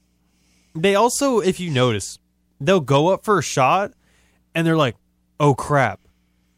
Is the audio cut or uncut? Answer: uncut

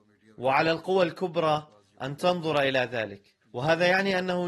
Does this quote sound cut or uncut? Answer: cut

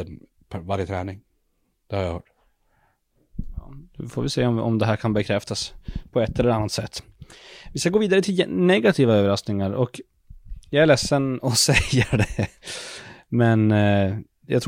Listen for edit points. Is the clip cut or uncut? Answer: uncut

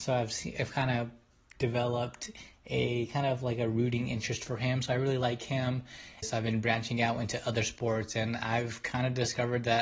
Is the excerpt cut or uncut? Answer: cut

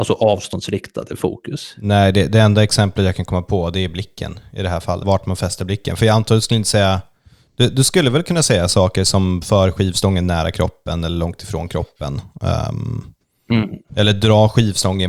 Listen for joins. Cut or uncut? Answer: cut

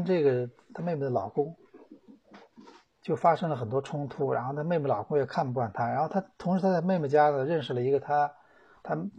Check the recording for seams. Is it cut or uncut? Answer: uncut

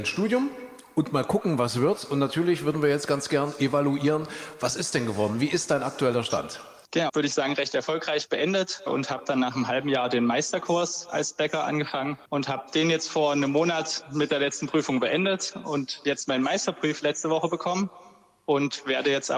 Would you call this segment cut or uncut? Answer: cut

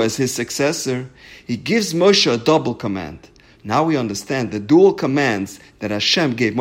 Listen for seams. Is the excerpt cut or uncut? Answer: cut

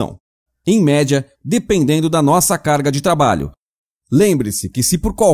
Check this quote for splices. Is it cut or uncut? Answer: cut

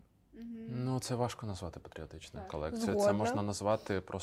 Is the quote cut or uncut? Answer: uncut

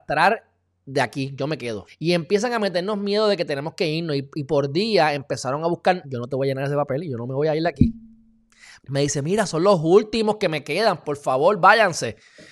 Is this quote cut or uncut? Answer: cut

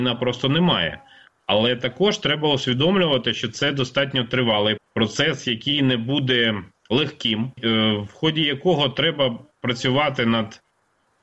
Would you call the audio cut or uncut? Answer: cut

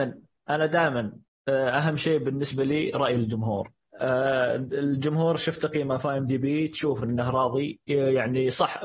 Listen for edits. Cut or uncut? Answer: uncut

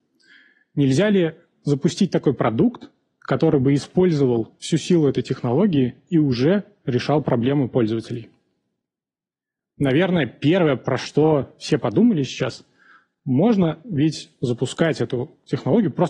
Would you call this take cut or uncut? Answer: uncut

